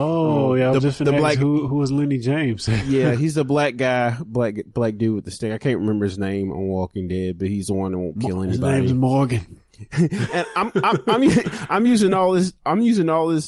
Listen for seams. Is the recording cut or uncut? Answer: uncut